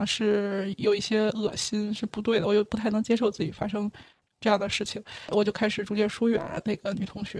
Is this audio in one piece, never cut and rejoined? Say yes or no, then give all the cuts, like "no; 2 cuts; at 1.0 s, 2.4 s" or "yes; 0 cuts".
yes; 0 cuts